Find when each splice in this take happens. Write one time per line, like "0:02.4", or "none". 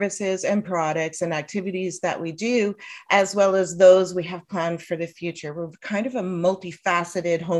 none